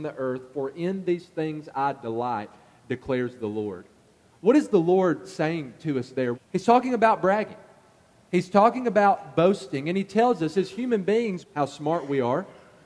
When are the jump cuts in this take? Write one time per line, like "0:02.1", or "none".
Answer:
0:06.3
0:11.4